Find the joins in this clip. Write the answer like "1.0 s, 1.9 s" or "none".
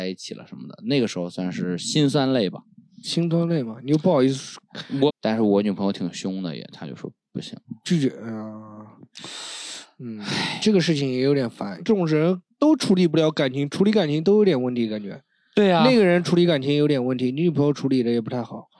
5.1 s, 11.8 s

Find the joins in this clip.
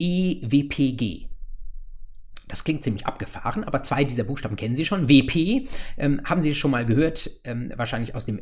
none

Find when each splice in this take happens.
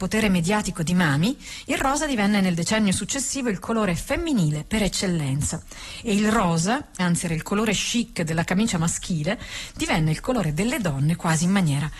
7.0 s

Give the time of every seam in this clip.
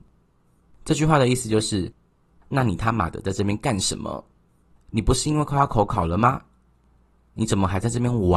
none

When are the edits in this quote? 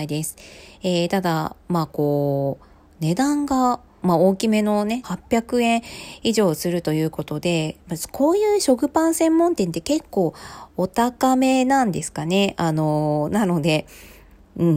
4.0 s, 5.0 s

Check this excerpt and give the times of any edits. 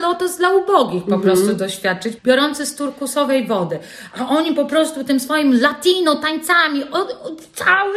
2.2 s

